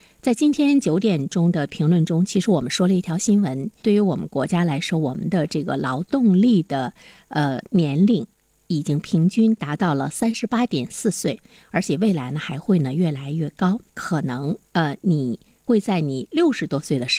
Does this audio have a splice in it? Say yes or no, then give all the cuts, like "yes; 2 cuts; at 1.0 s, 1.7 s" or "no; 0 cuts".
yes; 2 cuts; at 3.8 s, 13.9 s